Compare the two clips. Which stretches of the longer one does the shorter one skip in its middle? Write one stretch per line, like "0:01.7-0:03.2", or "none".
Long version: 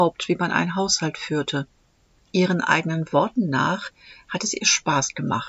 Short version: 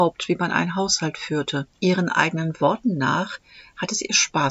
0:01.7-0:02.2